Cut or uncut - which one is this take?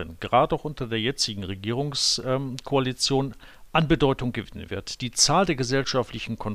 uncut